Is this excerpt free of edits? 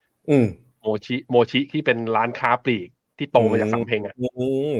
yes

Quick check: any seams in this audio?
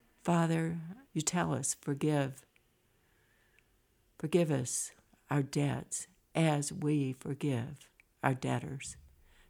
yes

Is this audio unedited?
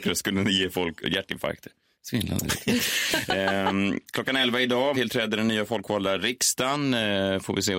no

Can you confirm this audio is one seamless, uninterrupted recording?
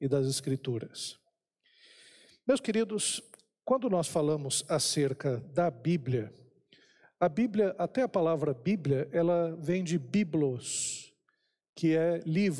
yes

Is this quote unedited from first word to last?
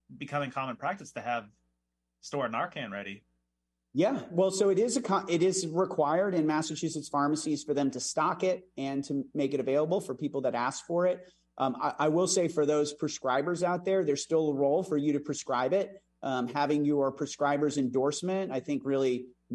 yes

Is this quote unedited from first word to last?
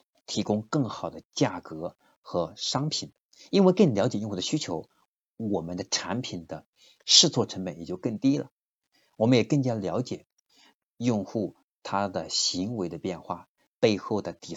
yes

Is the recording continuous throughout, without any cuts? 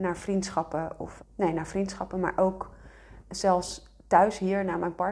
no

